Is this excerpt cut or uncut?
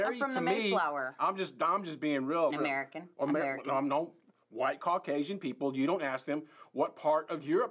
cut